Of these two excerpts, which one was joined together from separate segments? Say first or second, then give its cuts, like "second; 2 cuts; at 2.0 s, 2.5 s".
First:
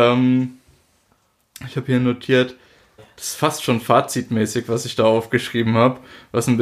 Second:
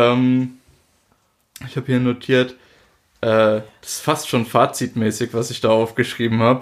first; 1 cut; at 3.0 s